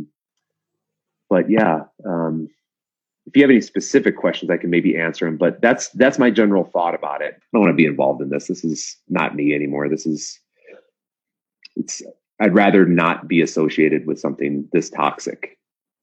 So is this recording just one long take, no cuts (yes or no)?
no